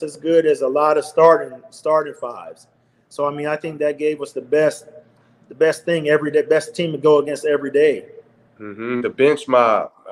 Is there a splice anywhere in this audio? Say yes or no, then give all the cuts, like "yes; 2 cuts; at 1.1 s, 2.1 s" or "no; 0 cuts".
no; 0 cuts